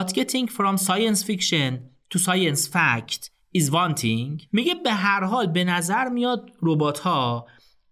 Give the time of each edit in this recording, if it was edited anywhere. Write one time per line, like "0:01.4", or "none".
0:04.5